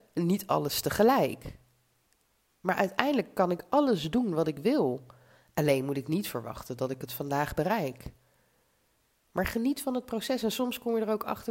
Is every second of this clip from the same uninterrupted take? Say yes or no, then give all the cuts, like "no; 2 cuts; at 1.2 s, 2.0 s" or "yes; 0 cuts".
yes; 0 cuts